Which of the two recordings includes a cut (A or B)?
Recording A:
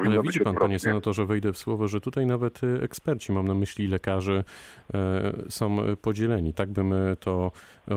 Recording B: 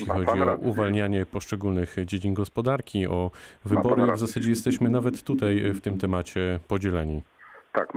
A